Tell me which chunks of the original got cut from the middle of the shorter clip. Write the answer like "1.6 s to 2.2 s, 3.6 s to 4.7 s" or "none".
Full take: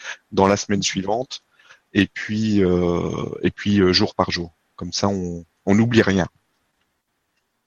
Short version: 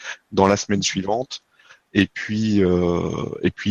none